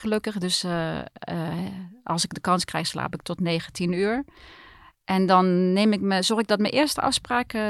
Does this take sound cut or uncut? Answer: uncut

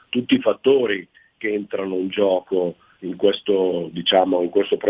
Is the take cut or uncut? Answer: uncut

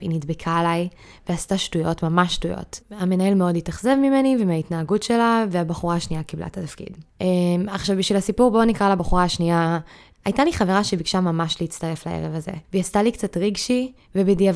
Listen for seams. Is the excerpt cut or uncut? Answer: cut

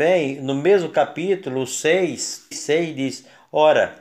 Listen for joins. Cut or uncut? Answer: cut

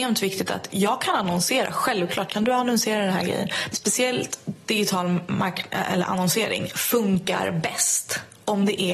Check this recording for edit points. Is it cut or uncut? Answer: cut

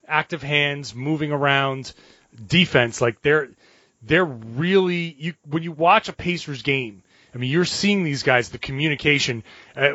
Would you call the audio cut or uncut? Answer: uncut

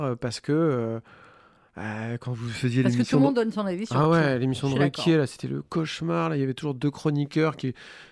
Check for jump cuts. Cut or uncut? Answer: uncut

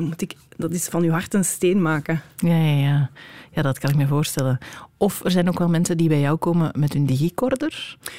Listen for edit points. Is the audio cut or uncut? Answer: uncut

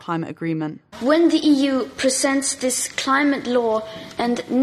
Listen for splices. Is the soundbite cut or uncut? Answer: cut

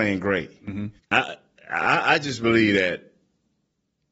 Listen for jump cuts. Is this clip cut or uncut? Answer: cut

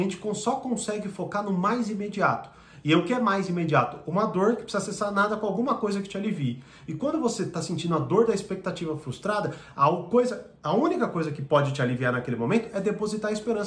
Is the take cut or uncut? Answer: uncut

